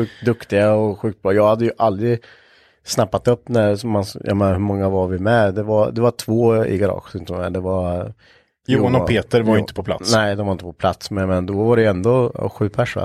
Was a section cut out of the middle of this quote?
no; 0 cuts

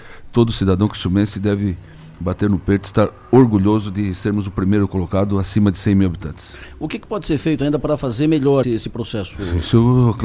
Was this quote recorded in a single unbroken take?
no; 1 cut; at 8.6 s

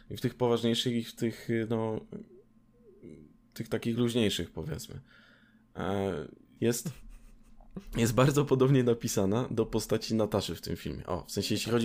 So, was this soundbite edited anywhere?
yes; 1 cut; at 6.6 s

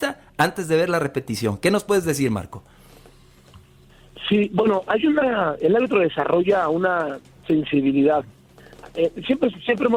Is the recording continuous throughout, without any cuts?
yes; 0 cuts

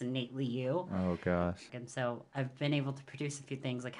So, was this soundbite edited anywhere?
yes; 1 cut; at 1.7 s

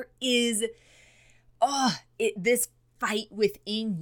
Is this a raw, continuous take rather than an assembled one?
yes; 0 cuts

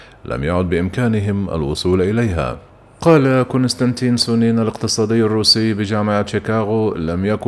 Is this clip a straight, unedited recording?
yes; 0 cuts

